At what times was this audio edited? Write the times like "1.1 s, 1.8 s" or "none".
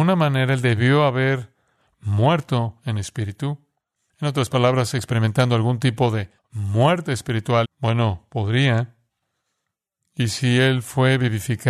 6.4 s, 7.6 s